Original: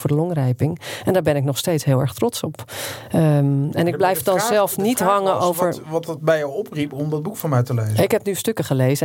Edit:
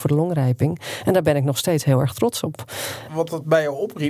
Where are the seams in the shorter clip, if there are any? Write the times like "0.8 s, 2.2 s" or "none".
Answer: 3.1 s